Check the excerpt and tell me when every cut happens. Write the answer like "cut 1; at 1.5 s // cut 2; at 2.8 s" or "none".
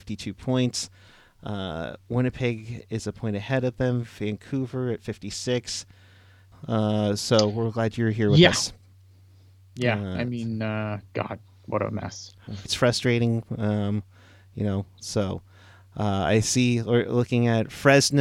cut 1; at 6.5 s // cut 2; at 12.7 s